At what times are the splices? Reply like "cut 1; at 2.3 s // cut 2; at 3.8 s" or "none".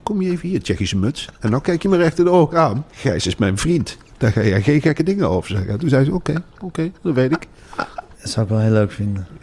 cut 1; at 2.9 s // cut 2; at 8.1 s